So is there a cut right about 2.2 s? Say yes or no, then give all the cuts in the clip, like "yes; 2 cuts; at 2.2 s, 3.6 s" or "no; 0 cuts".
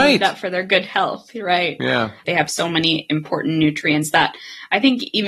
yes; 1 cut; at 2.2 s